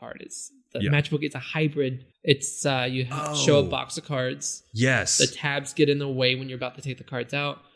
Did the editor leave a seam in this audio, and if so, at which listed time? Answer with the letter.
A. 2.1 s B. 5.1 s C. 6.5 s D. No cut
A